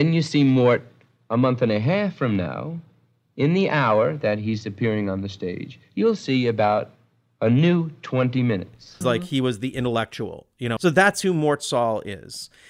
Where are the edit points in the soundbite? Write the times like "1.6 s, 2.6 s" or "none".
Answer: 9.0 s, 10.8 s